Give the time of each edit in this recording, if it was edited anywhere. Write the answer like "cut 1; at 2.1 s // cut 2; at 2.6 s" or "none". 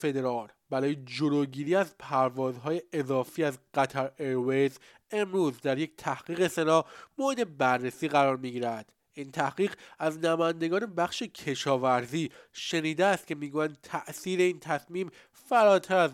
none